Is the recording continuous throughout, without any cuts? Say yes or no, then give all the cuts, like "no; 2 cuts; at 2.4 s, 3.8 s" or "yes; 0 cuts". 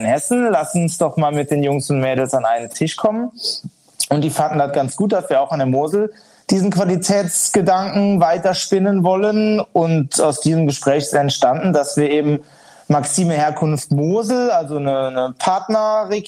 yes; 0 cuts